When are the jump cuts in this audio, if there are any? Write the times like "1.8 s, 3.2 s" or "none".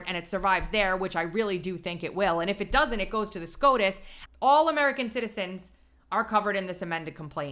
4.3 s